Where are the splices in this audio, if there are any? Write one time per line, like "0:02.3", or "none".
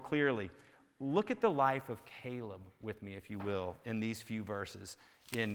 none